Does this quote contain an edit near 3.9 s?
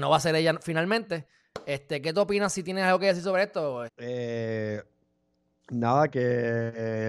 yes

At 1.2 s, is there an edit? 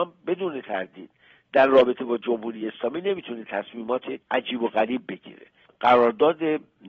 no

